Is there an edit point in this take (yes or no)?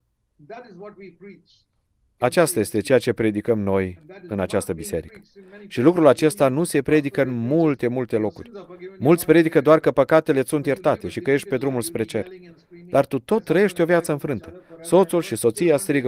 no